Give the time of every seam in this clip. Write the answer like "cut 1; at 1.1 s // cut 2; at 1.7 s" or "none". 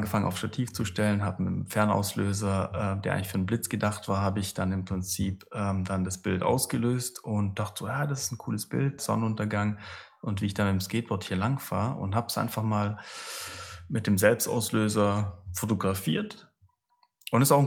cut 1; at 9.0 s